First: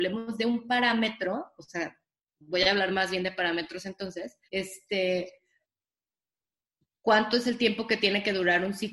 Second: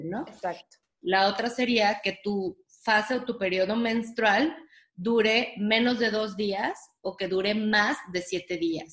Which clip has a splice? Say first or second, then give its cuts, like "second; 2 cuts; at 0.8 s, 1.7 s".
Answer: first; 1 cut; at 4.4 s